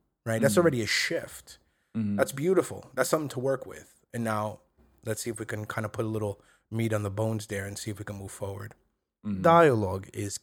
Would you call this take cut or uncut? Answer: uncut